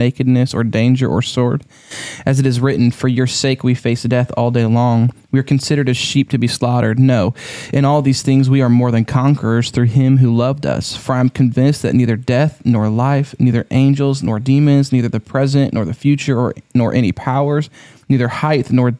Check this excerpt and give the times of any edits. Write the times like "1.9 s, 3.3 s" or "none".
none